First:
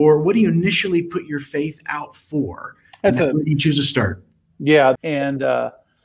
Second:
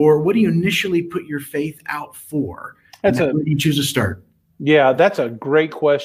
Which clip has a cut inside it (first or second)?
first